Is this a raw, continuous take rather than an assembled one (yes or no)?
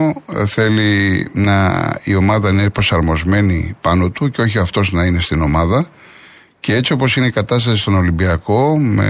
yes